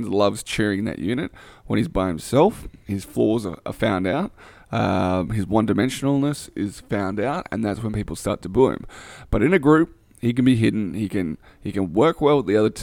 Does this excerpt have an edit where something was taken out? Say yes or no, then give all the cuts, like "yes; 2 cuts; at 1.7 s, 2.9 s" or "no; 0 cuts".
no; 0 cuts